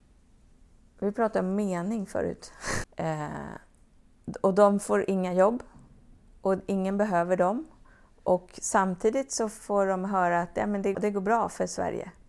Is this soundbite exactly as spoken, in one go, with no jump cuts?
no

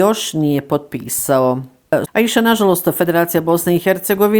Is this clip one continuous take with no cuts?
no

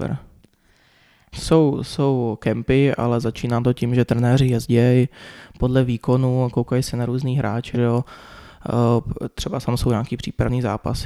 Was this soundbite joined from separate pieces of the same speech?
yes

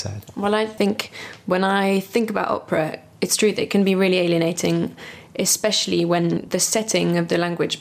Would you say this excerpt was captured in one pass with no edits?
yes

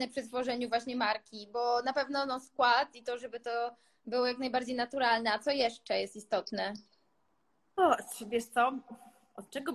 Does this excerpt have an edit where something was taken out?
no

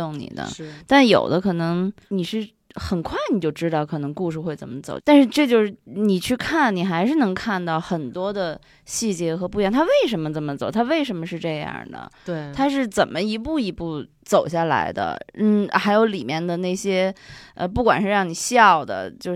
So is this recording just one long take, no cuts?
yes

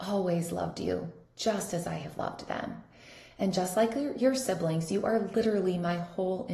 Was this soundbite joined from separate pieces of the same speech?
no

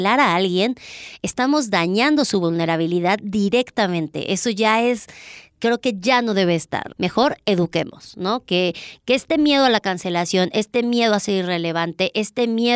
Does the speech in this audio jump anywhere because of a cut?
yes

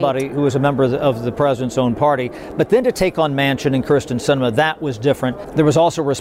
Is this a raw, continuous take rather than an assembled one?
yes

